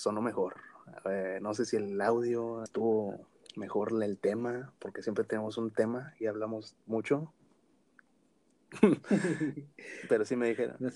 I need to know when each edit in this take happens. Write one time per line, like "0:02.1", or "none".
0:02.7